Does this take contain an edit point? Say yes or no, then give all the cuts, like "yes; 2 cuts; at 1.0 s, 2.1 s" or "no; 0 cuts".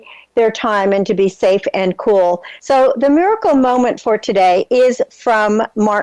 yes; 1 cut; at 2.6 s